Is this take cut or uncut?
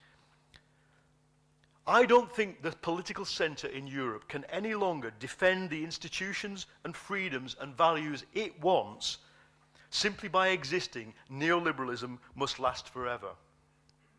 uncut